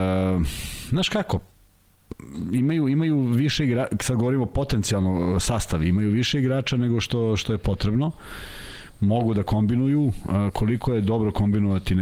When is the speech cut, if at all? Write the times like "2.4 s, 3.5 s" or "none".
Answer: none